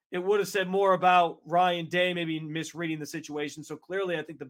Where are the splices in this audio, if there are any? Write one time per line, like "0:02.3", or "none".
none